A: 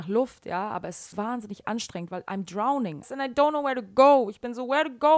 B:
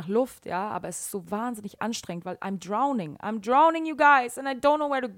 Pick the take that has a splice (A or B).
A